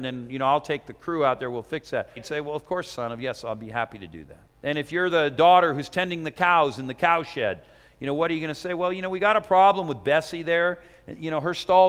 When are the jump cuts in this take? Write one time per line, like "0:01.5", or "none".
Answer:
0:02.2
0:04.5